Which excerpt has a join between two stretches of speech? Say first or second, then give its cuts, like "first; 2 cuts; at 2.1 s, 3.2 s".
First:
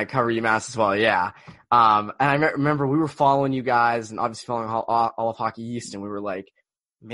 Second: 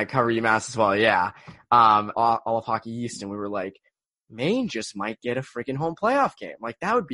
second; 1 cut; at 2.1 s